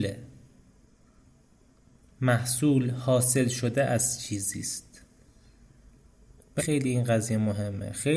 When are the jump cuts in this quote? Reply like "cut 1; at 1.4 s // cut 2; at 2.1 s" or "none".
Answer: cut 1; at 6.6 s